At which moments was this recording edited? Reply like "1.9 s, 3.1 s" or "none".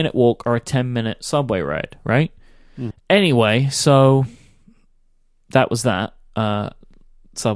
2.9 s

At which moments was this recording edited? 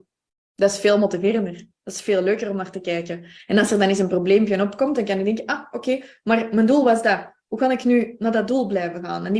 none

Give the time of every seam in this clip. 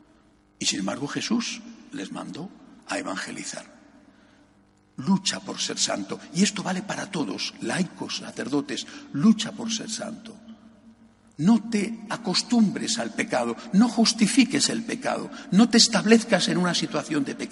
none

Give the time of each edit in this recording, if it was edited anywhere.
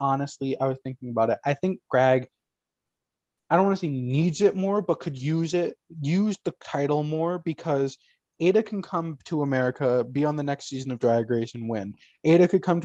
none

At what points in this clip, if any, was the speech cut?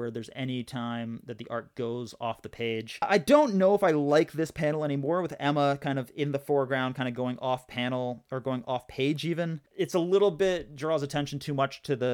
none

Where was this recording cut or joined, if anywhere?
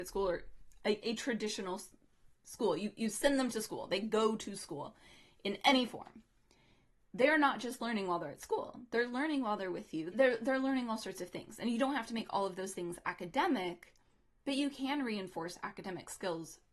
10.1 s

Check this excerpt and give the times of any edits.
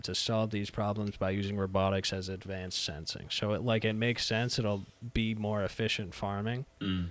none

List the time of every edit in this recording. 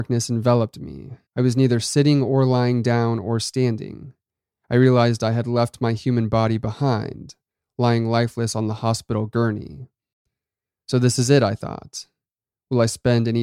1.3 s

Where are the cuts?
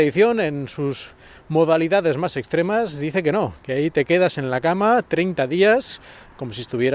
none

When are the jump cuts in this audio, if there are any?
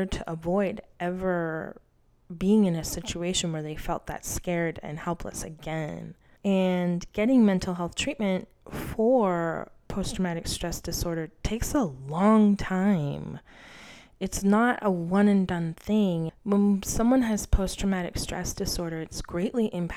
6.4 s, 16.3 s

